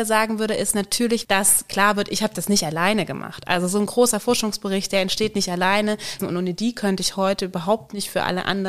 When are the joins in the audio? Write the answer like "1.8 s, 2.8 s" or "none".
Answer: 1.2 s, 6.2 s